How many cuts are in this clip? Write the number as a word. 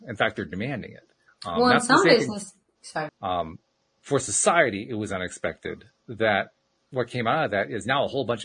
two